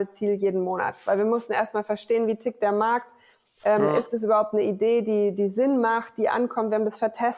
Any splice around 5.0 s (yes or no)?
no